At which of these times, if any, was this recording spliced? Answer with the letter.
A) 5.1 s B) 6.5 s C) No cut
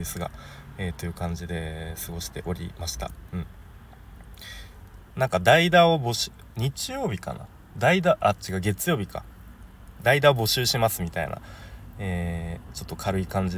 A